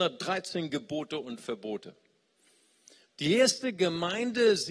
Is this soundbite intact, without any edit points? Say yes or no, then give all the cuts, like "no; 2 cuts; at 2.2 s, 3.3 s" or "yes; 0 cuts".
no; 1 cut; at 3.0 s